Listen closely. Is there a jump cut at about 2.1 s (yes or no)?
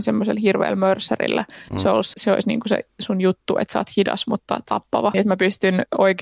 yes